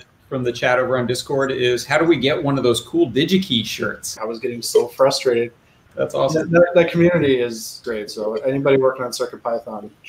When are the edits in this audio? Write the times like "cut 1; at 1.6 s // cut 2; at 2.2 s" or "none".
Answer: cut 1; at 4.2 s // cut 2; at 5.9 s // cut 3; at 7.8 s